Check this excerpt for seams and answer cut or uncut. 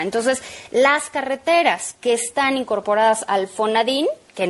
uncut